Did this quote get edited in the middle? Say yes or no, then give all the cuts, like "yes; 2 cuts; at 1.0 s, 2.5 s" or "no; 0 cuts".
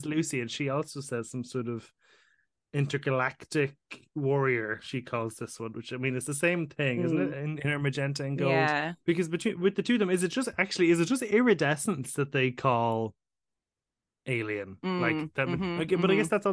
no; 0 cuts